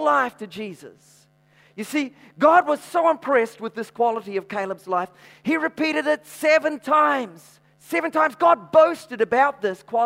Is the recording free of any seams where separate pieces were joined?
no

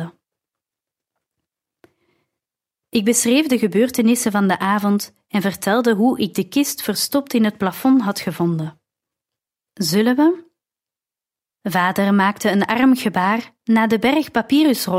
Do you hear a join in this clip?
yes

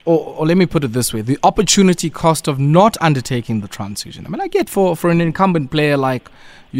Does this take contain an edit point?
no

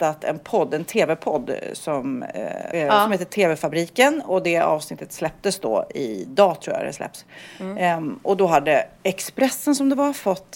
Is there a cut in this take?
yes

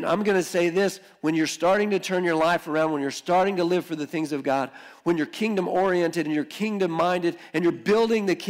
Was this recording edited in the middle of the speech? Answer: no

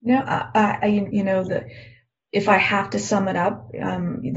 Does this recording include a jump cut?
yes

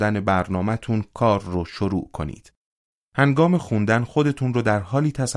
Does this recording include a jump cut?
yes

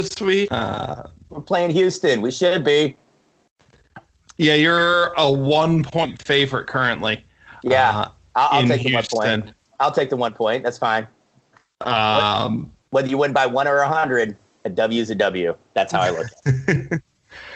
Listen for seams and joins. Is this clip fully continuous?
yes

